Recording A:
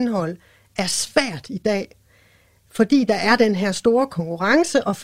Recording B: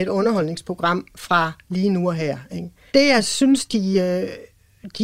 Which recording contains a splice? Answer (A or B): B